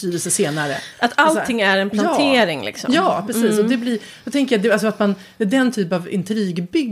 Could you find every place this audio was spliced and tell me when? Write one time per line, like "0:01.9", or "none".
none

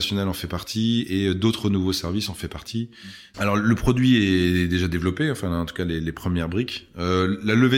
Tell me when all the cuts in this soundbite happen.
0:03.3

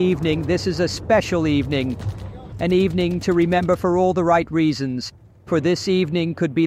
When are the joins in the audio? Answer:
0:02.5
0:05.5

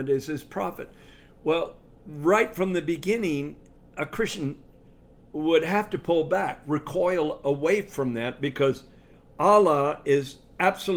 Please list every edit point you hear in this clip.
none

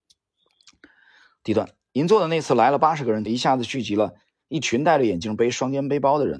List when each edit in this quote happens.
0:03.3

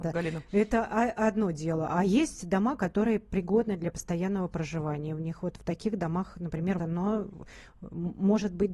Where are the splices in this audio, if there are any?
0:06.8

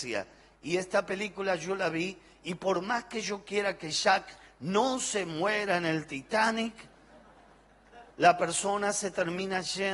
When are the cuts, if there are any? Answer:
0:08.1

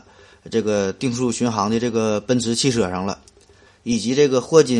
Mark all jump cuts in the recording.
0:03.7

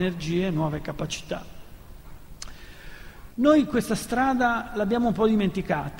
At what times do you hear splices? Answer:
0:03.3

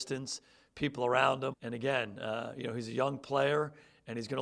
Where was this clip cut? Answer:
0:01.5

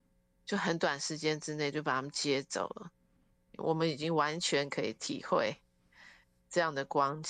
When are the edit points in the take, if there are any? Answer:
0:01.7
0:03.5

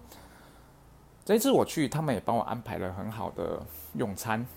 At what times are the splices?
none

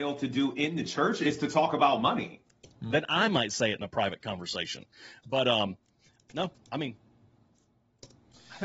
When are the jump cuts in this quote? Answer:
0:02.9
0:06.2

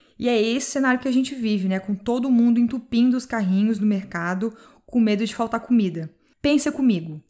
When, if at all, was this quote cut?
0:06.3

